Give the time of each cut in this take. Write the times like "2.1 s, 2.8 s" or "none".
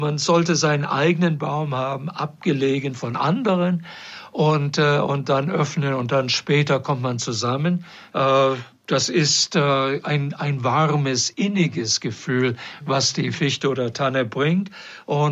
8.1 s

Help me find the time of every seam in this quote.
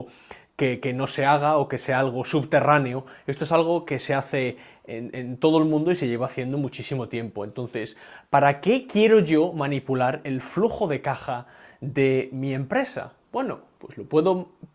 none

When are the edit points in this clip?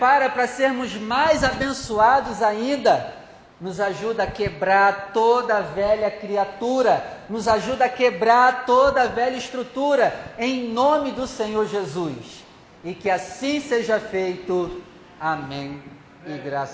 none

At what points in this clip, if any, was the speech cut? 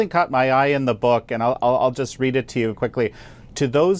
2.7 s

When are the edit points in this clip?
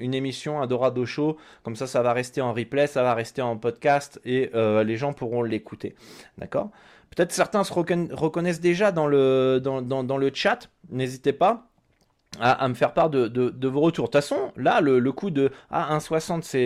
none

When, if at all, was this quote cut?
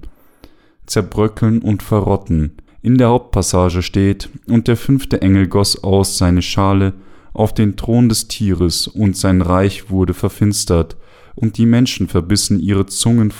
2.7 s

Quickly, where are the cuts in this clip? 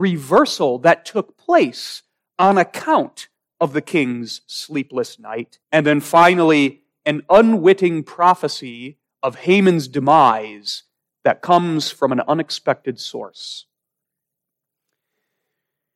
5.6 s

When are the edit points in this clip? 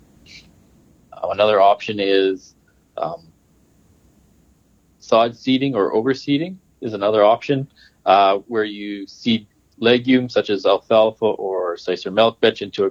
none

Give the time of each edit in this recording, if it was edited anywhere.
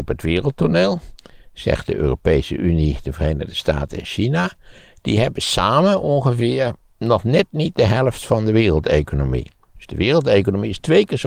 none

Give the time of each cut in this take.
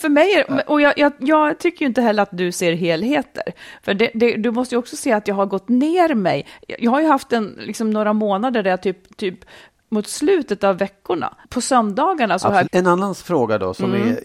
11.4 s, 12.7 s

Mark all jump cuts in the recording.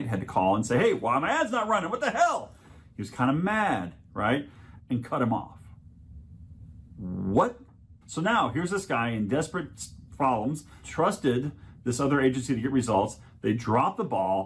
4.8 s, 8.0 s, 10.8 s

